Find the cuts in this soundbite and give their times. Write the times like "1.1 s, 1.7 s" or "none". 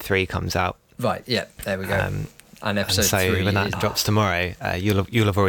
3.7 s